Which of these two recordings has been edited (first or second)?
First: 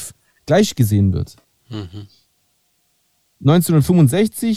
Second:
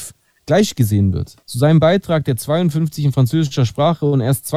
second